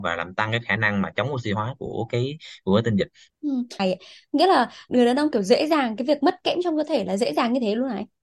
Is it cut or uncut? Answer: cut